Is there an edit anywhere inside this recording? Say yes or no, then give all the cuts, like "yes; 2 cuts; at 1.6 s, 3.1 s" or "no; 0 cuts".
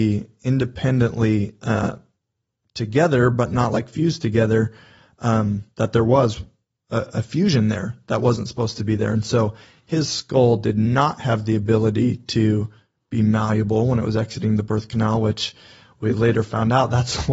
yes; 1 cut; at 5.7 s